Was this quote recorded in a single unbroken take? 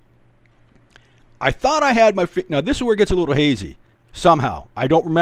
no; 1 cut; at 3.9 s

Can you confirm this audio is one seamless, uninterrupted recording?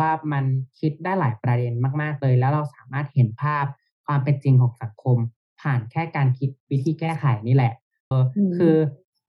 no; 1 cut; at 8.1 s

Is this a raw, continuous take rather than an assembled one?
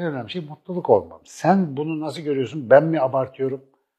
no; 1 cut; at 1.2 s

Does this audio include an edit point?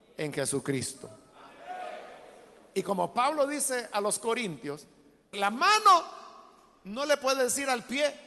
yes; 1 cut; at 5.3 s

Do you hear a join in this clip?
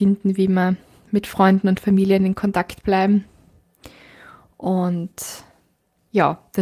no; 0 cuts

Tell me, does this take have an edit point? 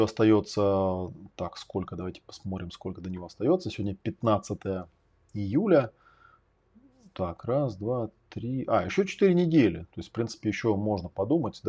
no; 0 cuts

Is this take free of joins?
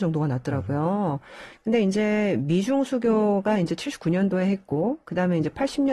no; 1 cut; at 1.5 s

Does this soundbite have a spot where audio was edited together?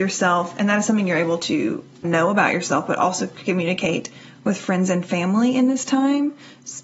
yes; 1 cut; at 2.0 s

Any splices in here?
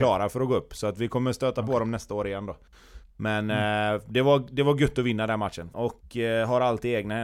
yes; 1 cut; at 5.7 s

